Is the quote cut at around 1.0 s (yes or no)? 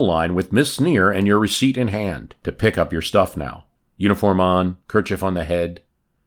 no